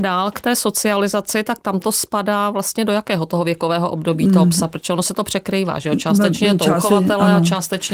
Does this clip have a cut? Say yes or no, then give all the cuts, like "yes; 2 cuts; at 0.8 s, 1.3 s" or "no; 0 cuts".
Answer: no; 0 cuts